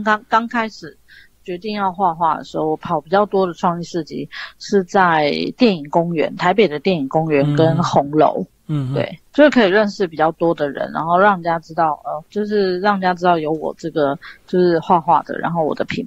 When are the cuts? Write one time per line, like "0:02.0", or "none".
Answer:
none